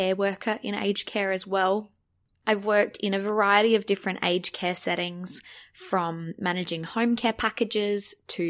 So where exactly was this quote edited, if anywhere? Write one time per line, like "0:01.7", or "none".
none

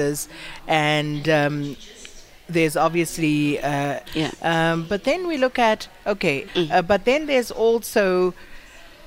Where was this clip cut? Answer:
0:04.1
0:06.5

